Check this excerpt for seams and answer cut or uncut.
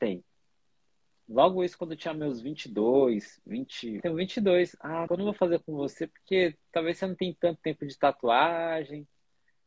cut